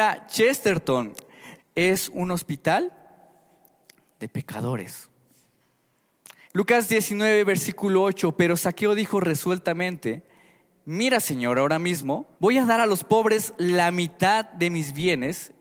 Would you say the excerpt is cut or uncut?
cut